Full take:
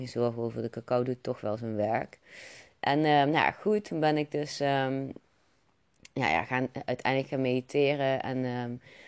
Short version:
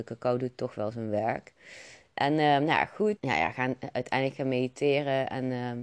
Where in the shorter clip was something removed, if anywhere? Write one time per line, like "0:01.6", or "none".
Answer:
0:03.2